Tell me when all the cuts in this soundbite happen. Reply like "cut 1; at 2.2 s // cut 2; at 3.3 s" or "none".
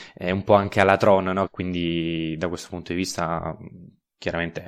cut 1; at 1.5 s